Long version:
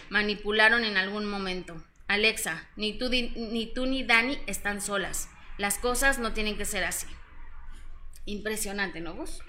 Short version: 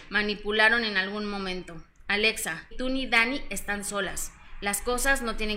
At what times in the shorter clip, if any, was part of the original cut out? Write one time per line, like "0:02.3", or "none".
0:02.7